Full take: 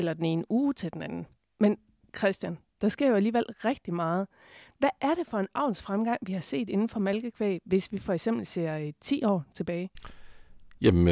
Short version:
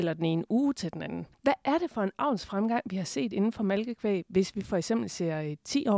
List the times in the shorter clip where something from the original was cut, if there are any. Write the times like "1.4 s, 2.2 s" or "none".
1.3 s